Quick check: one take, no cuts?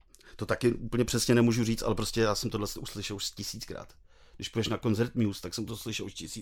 yes; 0 cuts

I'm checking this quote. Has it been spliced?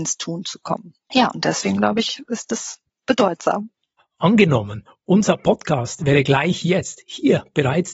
yes; 1 cut; at 4.0 s

